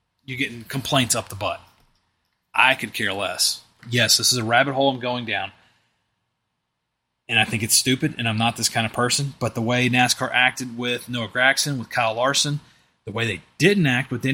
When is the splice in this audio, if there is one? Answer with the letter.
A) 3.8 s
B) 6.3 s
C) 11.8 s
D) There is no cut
A